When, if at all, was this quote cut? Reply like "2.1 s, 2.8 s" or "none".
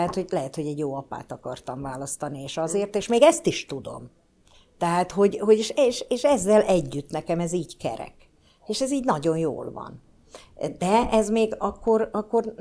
none